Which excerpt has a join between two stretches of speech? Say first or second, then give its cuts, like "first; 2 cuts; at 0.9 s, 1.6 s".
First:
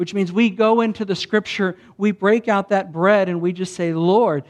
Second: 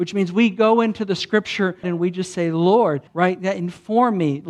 second; 2 cuts; at 1.8 s, 3.1 s